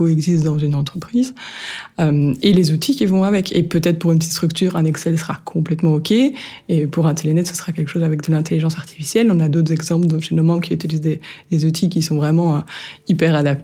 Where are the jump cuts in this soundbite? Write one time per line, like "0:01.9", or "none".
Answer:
none